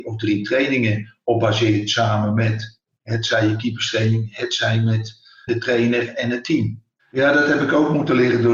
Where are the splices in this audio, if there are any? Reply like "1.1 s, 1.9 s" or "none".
5.5 s, 7.0 s